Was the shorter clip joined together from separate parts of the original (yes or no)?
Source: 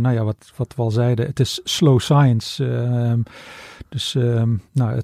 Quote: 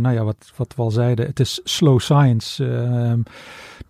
no